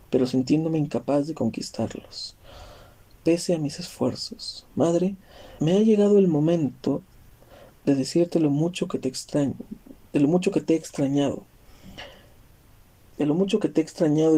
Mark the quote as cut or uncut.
cut